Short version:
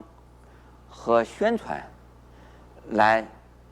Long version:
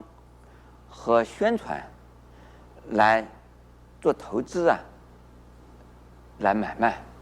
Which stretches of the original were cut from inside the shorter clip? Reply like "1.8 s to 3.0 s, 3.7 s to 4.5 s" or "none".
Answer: none